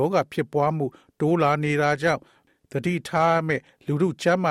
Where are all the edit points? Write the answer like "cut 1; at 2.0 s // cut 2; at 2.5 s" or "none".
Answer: none